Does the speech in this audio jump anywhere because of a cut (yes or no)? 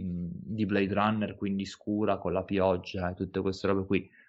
no